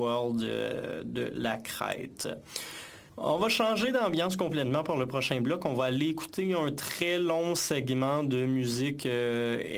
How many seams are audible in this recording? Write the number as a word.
one